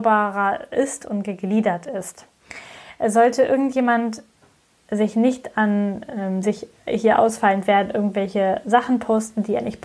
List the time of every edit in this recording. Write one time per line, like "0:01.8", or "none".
0:06.4